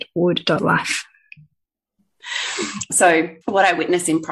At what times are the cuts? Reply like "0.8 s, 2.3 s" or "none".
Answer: 3.4 s